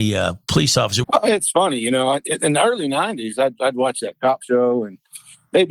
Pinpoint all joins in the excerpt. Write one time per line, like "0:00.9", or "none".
0:01.0